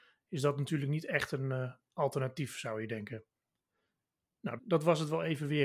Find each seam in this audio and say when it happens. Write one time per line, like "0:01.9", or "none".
0:04.6